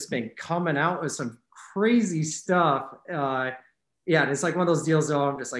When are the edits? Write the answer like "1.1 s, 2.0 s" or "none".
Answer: none

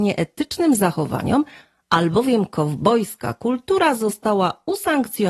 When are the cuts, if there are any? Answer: none

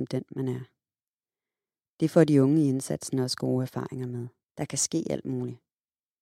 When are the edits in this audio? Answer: 4.4 s

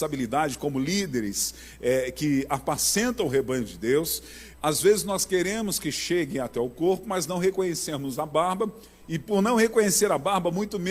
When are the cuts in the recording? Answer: 4.5 s

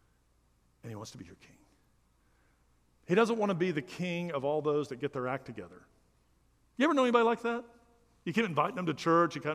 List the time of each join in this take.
none

